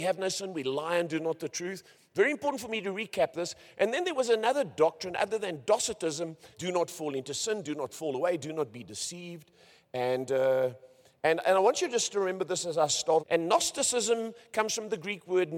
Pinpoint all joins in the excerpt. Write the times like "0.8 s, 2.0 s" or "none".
6.5 s, 13.2 s

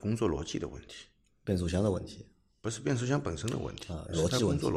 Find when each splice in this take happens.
none

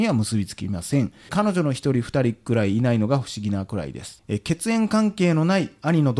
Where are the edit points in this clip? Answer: 1.3 s

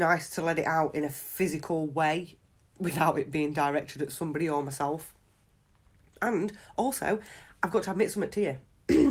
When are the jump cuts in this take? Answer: none

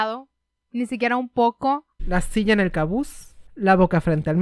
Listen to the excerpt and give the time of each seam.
2.0 s

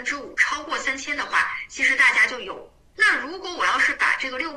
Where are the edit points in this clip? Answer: 2.9 s

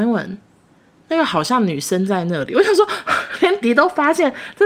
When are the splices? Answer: 3.6 s

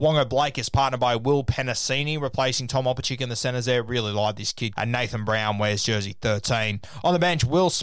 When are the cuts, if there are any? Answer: 4.7 s

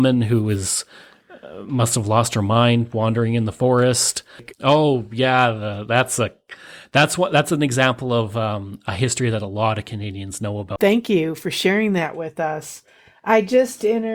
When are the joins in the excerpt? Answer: 4.5 s, 10.8 s

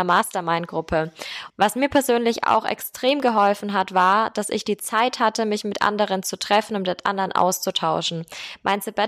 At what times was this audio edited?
1.5 s

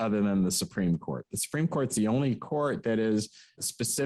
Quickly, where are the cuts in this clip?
none

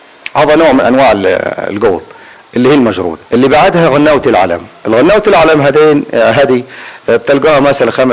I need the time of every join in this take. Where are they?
3.3 s

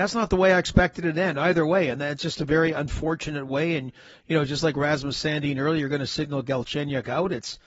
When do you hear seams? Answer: none

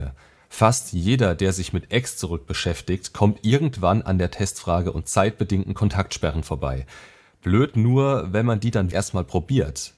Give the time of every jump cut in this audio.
8.9 s

